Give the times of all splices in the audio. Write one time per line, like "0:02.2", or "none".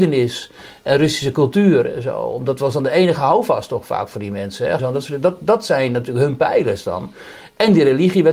0:04.8